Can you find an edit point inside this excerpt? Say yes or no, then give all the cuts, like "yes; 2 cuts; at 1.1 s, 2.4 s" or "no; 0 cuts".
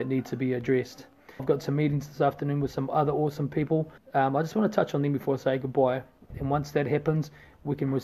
yes; 3 cuts; at 1.4 s, 4.0 s, 6.3 s